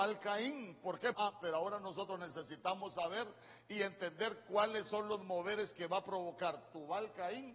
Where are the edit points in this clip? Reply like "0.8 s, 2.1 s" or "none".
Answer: 1.1 s